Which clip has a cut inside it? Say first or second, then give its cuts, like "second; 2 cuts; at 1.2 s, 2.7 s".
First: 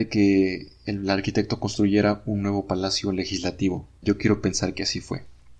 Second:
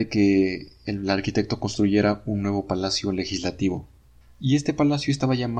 first; 1 cut; at 4.0 s